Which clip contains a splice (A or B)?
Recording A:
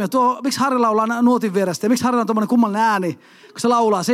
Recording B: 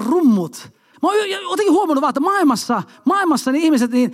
B